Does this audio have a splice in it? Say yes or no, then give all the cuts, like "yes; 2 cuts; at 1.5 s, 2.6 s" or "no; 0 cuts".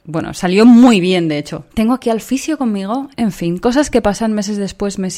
yes; 2 cuts; at 1.7 s, 3.1 s